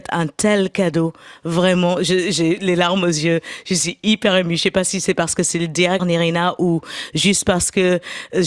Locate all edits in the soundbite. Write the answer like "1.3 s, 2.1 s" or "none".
6.0 s